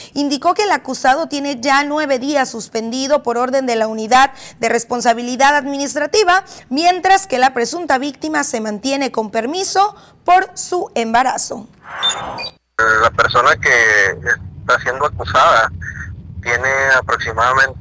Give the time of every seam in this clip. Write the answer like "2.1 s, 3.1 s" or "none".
11.7 s, 16.4 s